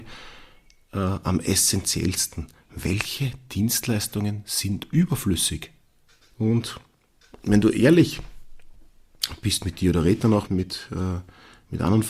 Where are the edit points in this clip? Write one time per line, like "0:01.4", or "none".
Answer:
0:06.2
0:10.5